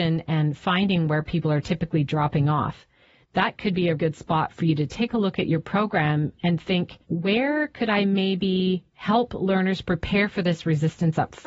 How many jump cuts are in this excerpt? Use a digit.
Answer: 3